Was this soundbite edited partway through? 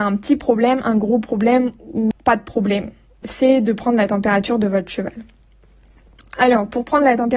no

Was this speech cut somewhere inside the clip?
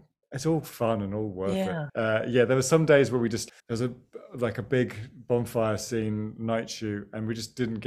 yes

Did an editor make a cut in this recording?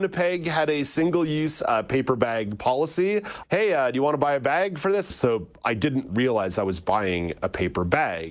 yes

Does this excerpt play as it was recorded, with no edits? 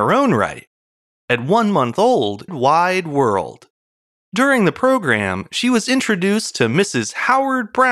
no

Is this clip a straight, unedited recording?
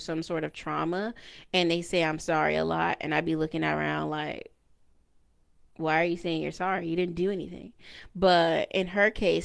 yes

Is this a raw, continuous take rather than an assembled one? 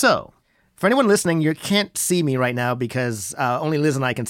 yes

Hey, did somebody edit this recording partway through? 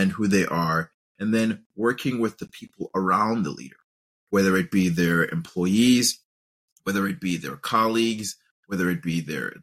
no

